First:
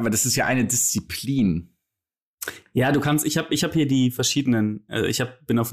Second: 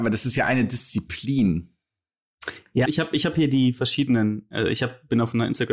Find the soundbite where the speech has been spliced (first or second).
second